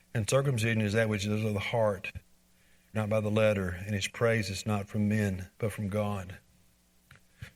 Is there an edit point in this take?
yes; 2 cuts; at 2.9 s, 5.5 s

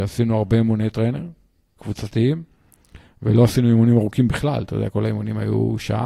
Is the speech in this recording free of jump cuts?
no; 1 cut; at 1.8 s

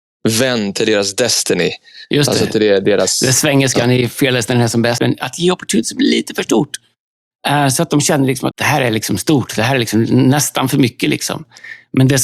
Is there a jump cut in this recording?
yes; 2 cuts; at 5.0 s, 8.5 s

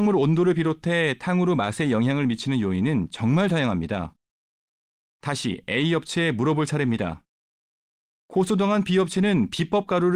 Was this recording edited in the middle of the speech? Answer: no; 0 cuts

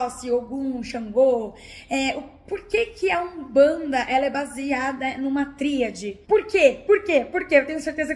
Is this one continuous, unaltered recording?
no; 1 cut; at 6.2 s

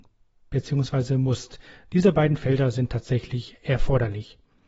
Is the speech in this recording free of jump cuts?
yes; 0 cuts

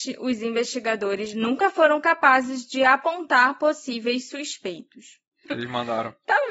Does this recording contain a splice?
yes; 1 cut; at 5.4 s

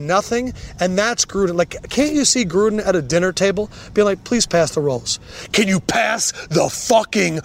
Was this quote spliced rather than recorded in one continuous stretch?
no; 0 cuts

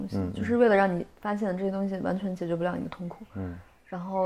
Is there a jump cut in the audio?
no; 0 cuts

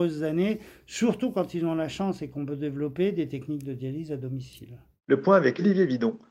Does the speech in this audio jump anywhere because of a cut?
no; 0 cuts

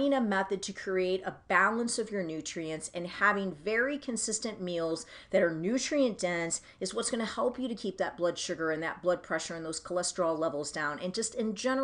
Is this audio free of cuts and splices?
yes; 0 cuts

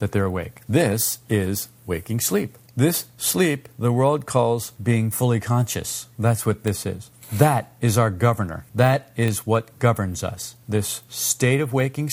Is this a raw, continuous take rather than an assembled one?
yes; 0 cuts

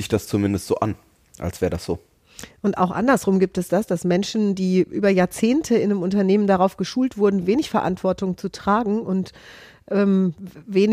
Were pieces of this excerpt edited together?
no; 0 cuts

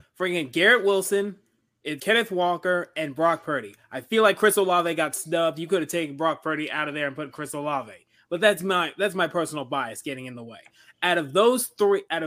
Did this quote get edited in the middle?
yes; 1 cut; at 2.0 s

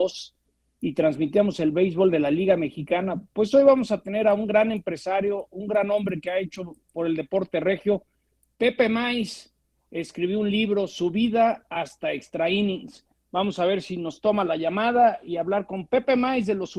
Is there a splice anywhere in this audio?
yes; 1 cut; at 6.8 s

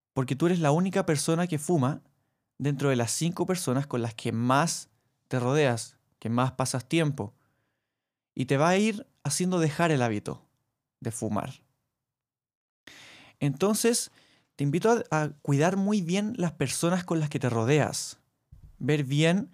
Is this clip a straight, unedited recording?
yes; 0 cuts

